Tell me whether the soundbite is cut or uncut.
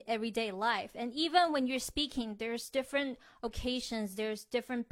uncut